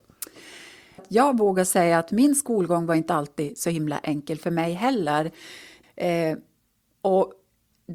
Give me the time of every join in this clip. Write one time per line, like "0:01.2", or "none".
0:01.0
0:05.8